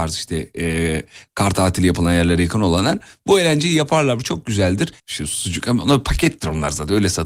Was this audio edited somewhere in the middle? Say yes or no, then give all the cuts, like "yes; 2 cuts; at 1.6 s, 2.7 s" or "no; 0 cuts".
yes; 1 cut; at 5.0 s